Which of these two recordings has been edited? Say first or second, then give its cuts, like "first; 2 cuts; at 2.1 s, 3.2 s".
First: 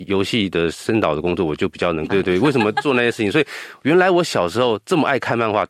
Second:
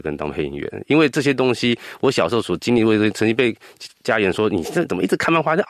first; 1 cut; at 2.1 s